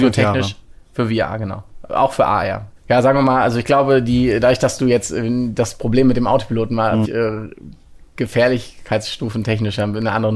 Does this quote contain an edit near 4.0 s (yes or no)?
no